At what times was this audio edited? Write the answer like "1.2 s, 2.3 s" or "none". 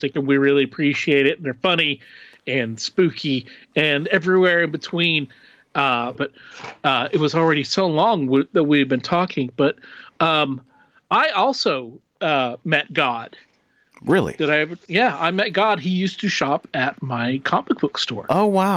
6.1 s